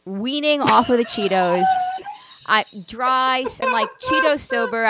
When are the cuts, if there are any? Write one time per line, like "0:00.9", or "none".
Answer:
0:03.6